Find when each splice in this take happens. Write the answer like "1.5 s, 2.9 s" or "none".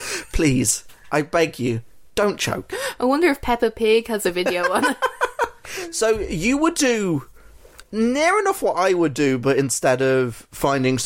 none